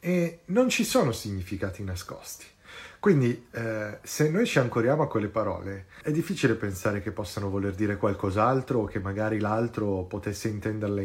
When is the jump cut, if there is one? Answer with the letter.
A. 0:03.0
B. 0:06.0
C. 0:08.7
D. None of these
B